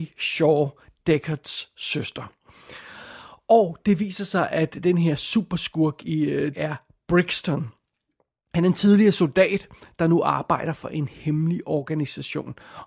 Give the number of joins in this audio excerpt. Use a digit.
1